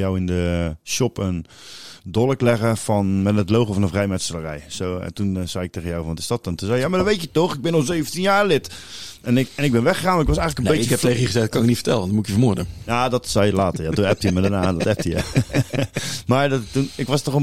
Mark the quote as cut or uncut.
uncut